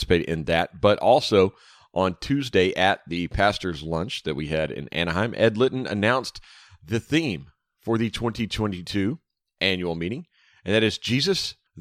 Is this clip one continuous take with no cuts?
yes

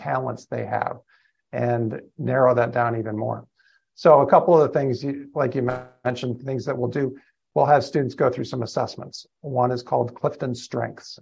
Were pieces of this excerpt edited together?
no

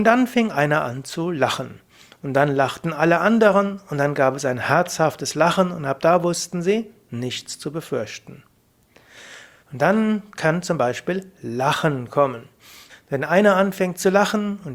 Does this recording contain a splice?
yes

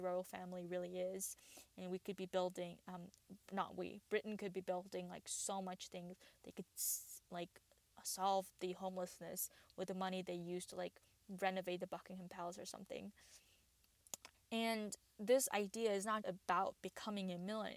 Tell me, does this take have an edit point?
yes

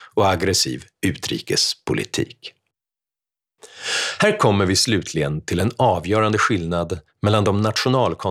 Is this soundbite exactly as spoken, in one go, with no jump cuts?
yes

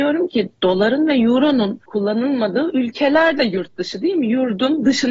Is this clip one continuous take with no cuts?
yes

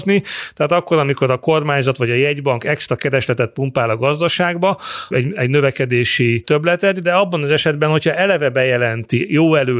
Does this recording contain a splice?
yes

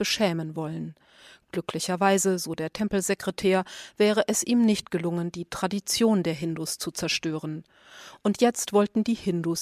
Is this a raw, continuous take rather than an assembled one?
yes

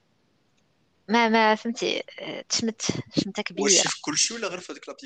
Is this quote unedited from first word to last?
yes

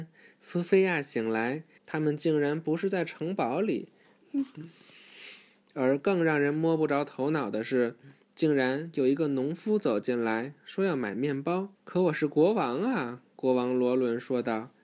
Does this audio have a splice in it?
yes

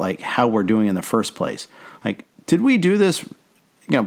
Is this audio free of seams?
yes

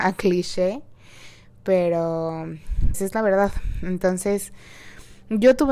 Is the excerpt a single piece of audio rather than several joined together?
no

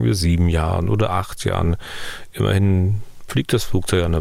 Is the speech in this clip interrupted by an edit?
no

